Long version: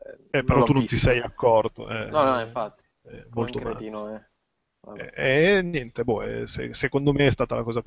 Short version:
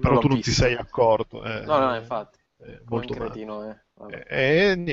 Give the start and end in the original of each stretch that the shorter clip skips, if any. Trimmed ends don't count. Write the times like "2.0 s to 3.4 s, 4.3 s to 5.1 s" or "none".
4.4 s to 4.8 s